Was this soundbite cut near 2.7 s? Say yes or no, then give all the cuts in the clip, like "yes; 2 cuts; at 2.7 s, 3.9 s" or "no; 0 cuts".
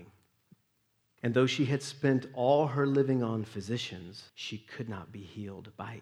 no; 2 cuts; at 1.2 s, 4.3 s